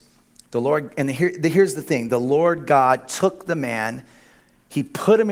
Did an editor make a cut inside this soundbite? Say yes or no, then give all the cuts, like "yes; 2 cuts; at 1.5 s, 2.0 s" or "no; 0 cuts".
no; 0 cuts